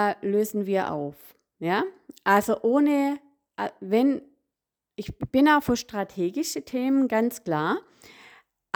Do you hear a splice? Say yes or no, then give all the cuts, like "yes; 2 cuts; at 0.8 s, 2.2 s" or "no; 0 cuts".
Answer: no; 0 cuts